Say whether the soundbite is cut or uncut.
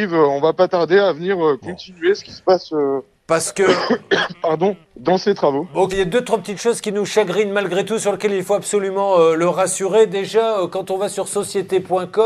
cut